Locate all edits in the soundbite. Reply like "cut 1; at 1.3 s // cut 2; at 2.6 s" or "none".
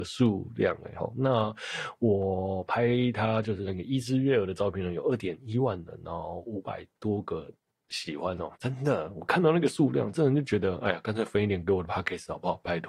cut 1; at 8.6 s